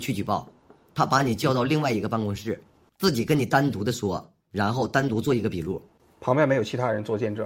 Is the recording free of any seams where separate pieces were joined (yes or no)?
yes